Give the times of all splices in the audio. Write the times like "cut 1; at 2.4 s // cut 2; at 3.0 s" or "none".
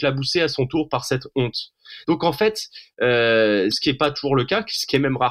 cut 1; at 2.0 s // cut 2; at 3.7 s